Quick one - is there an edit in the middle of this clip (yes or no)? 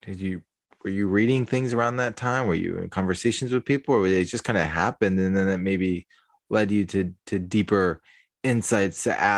no